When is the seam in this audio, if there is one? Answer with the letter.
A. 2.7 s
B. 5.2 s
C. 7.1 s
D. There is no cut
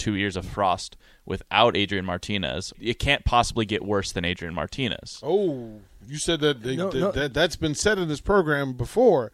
A